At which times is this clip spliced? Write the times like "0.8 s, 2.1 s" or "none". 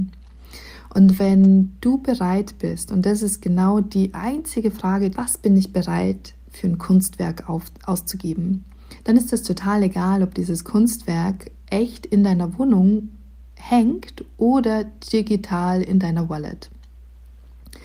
5.1 s